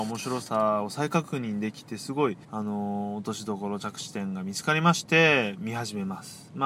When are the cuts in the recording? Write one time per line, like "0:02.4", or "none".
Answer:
0:02.4